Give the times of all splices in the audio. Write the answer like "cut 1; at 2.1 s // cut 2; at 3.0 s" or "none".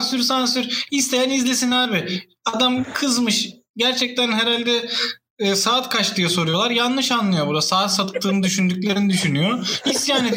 none